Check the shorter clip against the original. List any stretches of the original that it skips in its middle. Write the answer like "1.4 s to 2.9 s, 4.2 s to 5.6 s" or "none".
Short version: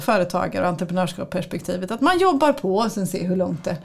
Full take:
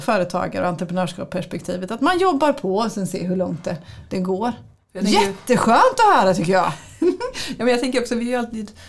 none